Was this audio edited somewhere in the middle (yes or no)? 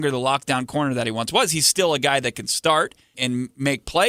yes